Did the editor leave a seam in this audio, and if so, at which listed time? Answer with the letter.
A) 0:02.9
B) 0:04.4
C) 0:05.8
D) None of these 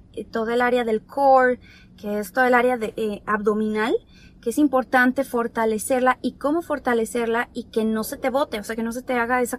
D